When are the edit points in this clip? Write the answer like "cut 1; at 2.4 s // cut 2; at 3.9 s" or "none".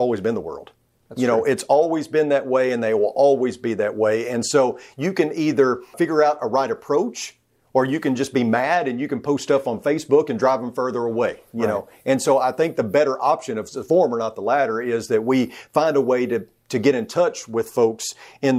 cut 1; at 1.0 s // cut 2; at 5.9 s